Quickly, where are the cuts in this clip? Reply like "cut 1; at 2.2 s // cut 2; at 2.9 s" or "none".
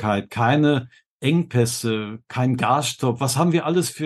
none